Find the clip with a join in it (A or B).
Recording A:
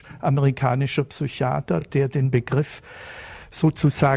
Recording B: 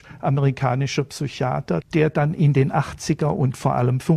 B